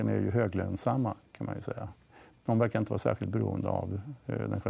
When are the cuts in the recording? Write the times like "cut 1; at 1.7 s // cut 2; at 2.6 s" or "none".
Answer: none